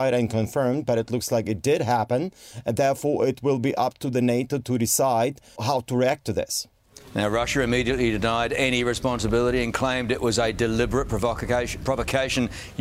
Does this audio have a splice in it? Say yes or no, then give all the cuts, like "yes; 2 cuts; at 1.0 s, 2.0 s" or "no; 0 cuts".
yes; 1 cut; at 5.6 s